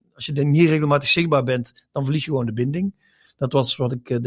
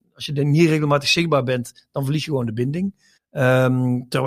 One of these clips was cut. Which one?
second; 1 cut; at 3.2 s

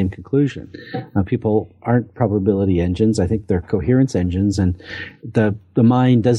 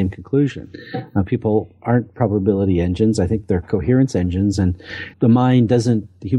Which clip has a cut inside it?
second; 1 cut; at 5.1 s

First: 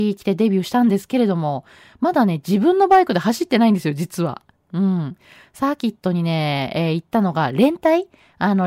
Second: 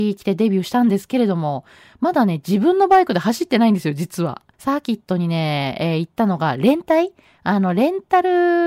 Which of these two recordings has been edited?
second; 1 cut; at 4.5 s

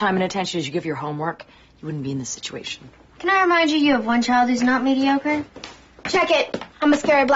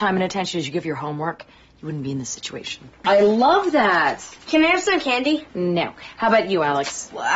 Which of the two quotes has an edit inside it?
second; 1 cut; at 3.0 s

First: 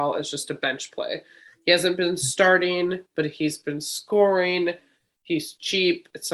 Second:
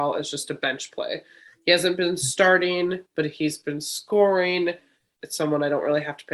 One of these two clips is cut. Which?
second; 1 cut; at 5.2 s

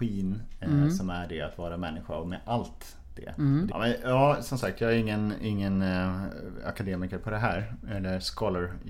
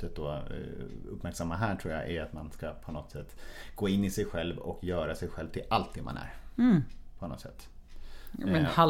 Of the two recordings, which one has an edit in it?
first; 1 cut; at 3.7 s

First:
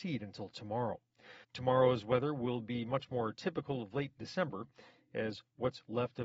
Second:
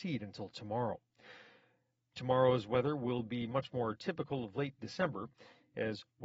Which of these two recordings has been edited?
first; 1 cut; at 1.4 s

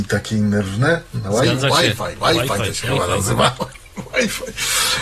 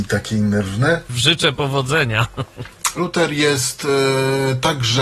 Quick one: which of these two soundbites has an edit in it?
second; 2 cuts; at 1.1 s, 3.0 s

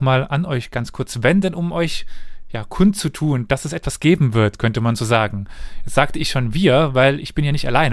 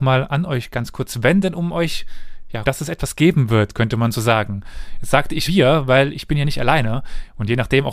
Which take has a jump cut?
second; 2 cuts; at 2.6 s, 5.4 s

